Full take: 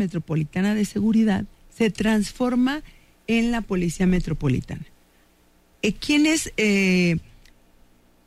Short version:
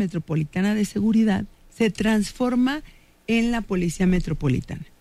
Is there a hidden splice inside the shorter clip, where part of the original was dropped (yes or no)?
no